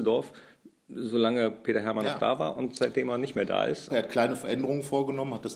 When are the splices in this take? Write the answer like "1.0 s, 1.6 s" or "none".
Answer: 3.9 s